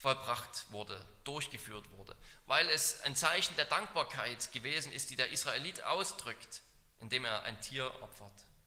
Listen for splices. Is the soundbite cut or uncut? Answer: uncut